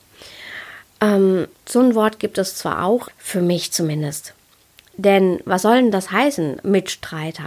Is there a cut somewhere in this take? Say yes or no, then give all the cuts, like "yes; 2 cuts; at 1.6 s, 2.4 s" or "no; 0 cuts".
yes; 2 cuts; at 1.5 s, 3.1 s